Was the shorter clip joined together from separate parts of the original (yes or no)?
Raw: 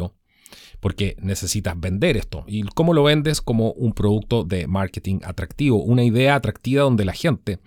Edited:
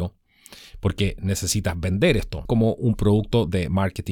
yes